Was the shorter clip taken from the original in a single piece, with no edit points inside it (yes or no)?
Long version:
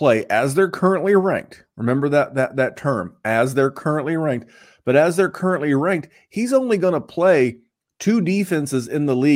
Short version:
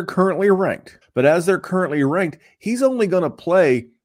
no